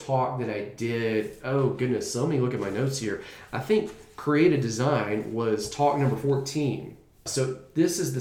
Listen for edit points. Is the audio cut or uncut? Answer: cut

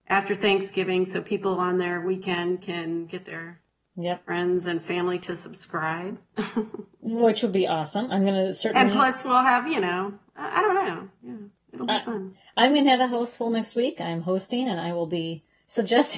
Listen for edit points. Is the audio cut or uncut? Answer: uncut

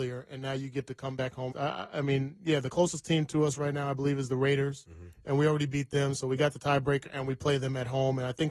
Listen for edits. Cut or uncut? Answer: cut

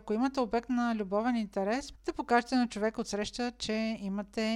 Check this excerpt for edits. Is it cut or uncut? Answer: cut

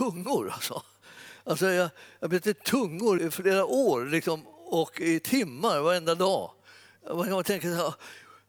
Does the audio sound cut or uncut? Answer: cut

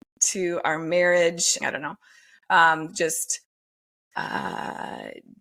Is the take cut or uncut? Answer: cut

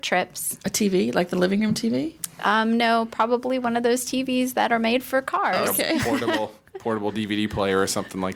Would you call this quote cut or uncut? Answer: uncut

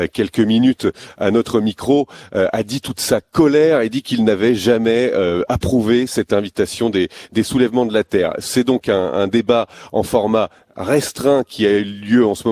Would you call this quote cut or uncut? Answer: uncut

